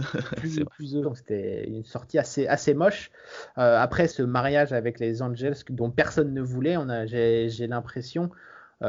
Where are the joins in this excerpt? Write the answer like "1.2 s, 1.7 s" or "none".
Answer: 1.0 s, 4.1 s